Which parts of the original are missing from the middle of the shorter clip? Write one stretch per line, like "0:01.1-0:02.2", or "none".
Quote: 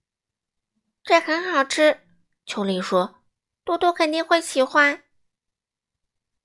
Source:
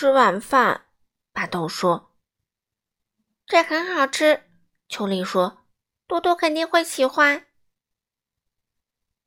none

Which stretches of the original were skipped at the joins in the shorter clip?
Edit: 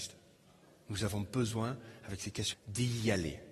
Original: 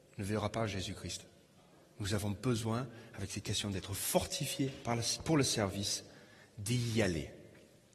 0:03.6-0:06.4

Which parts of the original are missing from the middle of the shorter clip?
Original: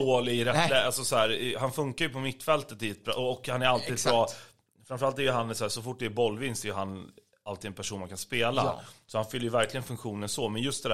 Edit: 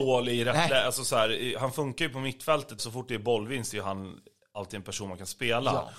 0:02.8-0:05.7

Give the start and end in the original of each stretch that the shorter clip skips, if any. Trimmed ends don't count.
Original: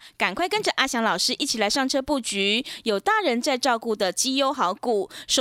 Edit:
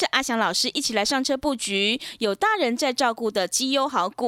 none

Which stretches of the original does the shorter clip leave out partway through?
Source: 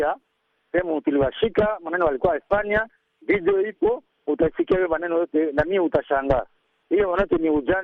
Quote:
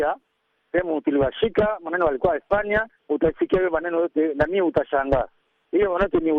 0:03.0-0:04.2

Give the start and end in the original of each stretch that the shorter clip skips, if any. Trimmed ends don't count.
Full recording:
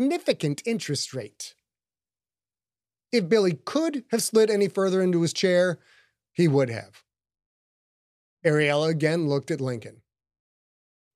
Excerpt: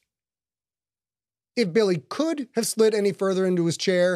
none

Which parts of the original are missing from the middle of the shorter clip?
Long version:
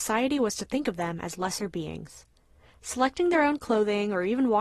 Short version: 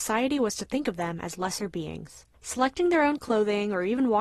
0:02.3-0:02.7

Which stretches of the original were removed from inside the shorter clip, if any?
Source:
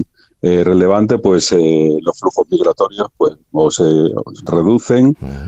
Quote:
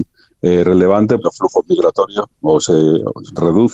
0:01.2-0:02.0
0:03.1-0:03.4

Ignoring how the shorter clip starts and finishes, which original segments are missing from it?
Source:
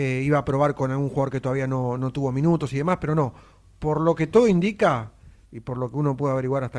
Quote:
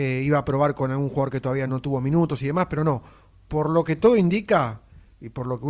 0:01.7-0:02.0

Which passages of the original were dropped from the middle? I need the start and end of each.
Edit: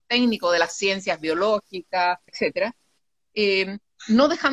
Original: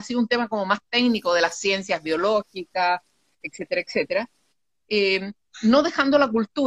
0:03.1-0:03.8

